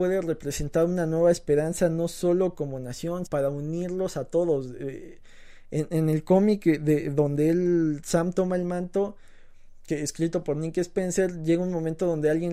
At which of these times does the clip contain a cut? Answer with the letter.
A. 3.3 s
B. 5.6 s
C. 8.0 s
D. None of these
A